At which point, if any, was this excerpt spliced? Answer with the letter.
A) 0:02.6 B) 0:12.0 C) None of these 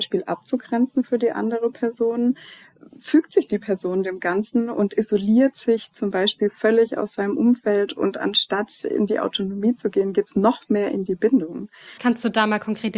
B